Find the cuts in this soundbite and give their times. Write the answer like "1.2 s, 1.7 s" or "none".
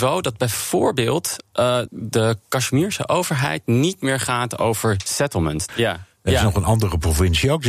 1.9 s, 5.7 s

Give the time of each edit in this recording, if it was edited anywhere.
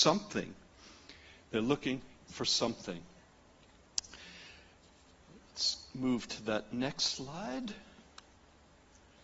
none

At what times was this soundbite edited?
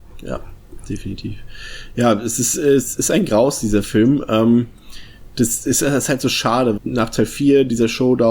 6.8 s

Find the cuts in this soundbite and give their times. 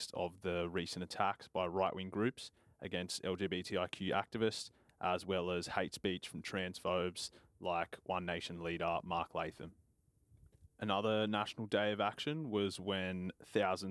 10.7 s

